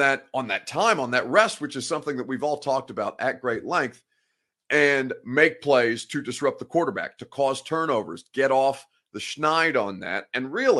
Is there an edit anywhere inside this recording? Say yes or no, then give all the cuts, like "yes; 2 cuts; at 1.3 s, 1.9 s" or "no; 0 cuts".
no; 0 cuts